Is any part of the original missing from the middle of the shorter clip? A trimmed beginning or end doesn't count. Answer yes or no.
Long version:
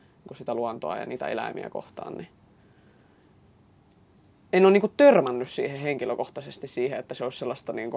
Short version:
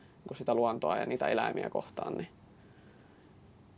no